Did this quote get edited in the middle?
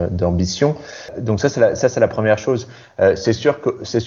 no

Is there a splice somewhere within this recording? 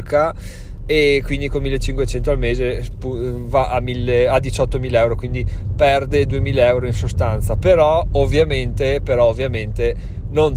no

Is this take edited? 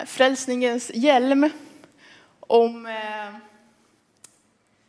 no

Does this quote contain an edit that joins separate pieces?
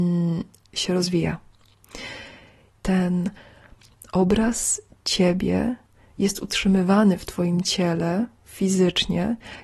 yes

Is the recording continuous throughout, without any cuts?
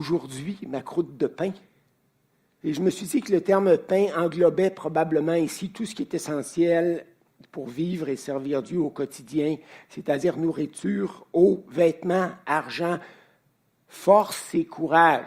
no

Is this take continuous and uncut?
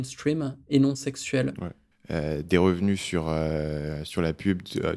no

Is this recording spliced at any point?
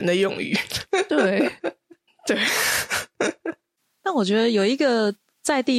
yes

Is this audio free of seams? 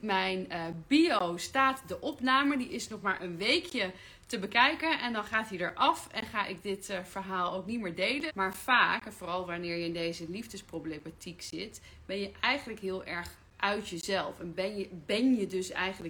no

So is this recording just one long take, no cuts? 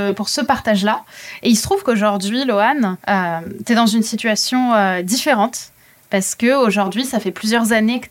no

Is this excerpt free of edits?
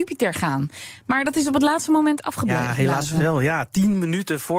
yes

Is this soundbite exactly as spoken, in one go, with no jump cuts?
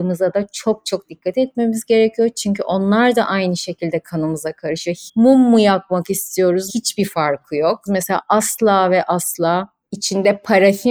no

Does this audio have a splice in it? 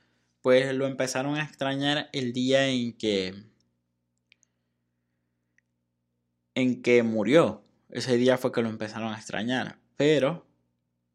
no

